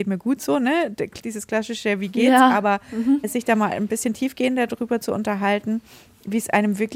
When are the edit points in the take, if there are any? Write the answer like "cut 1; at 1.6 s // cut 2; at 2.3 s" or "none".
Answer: none